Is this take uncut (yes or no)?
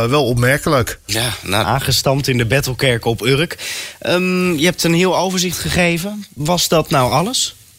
no